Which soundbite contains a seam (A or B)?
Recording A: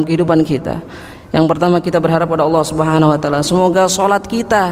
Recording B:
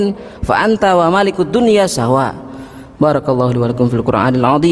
B